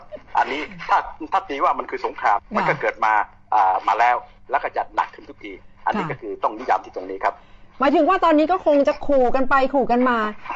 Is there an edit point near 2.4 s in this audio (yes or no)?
yes